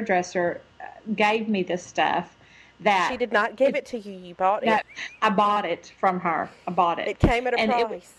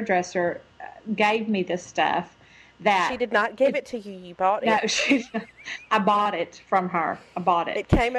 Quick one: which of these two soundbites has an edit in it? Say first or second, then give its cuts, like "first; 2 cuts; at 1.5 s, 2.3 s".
first; 1 cut; at 4.8 s